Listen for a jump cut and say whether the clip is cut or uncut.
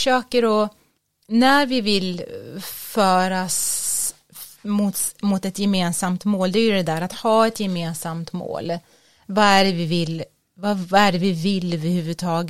uncut